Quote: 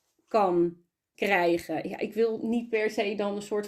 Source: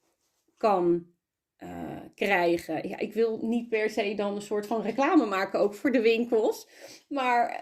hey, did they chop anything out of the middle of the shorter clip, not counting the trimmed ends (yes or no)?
yes